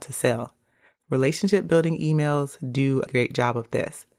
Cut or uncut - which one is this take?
cut